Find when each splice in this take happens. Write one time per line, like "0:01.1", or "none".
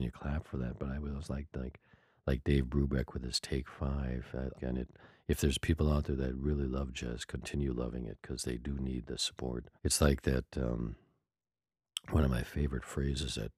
0:04.5
0:09.8